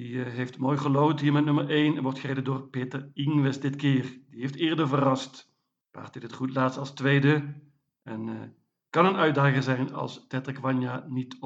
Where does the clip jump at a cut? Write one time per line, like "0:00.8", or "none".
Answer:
0:05.8